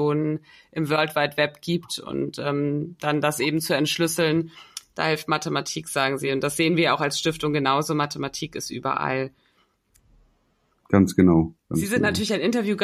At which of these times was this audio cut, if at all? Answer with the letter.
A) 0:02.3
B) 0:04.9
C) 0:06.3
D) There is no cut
D